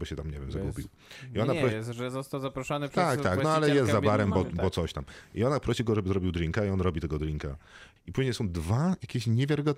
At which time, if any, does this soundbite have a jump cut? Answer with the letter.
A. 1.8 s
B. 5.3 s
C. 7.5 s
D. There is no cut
D